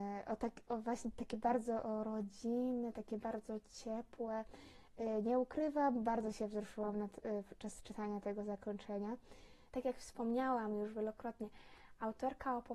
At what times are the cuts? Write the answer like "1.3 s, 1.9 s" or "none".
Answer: 9.7 s